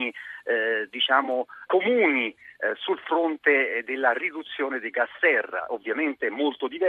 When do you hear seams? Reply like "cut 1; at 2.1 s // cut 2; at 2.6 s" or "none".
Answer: cut 1; at 1.7 s